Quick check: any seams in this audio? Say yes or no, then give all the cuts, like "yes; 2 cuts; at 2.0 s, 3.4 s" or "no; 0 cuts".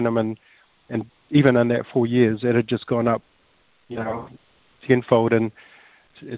no; 0 cuts